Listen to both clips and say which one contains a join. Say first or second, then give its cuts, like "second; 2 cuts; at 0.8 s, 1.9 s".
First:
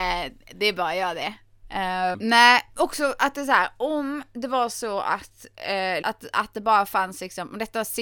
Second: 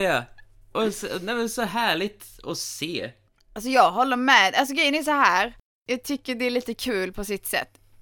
first; 2 cuts; at 2.1 s, 6.0 s